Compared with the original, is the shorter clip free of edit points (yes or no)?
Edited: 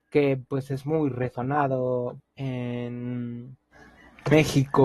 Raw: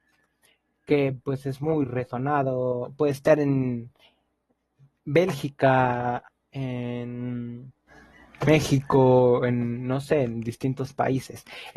no